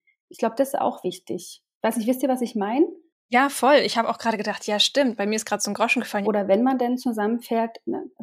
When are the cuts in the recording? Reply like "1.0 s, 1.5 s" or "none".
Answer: 6.2 s